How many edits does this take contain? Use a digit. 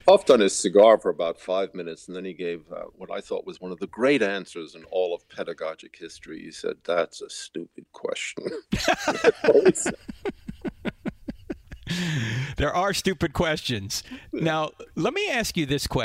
0